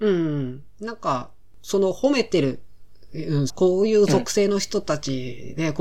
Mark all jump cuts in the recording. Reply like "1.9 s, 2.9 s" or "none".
3.5 s

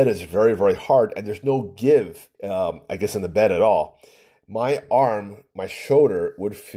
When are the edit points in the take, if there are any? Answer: 2.3 s

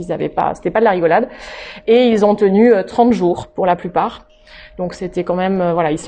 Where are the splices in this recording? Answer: none

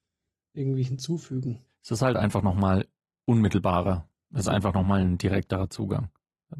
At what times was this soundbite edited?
none

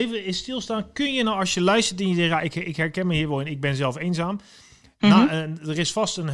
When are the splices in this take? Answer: none

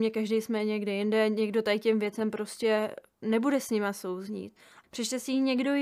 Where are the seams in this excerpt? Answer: 4.8 s

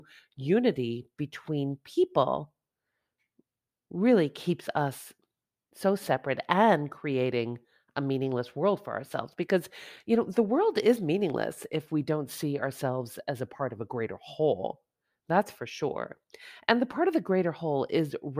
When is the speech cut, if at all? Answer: none

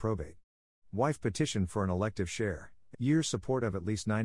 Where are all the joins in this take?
2.9 s

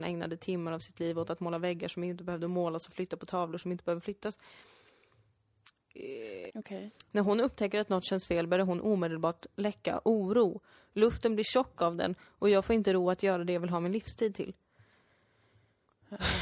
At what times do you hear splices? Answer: 6.5 s

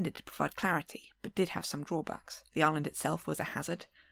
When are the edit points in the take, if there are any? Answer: 2.5 s

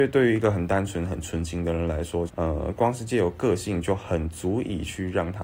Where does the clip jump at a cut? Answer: 2.3 s

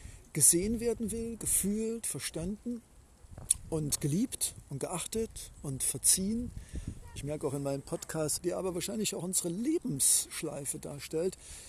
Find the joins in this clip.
7.2 s, 8.4 s

